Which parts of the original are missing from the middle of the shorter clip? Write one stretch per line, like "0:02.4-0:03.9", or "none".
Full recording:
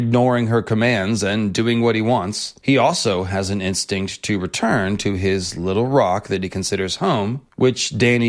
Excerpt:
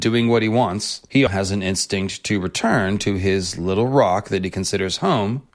0:02.8-0:03.3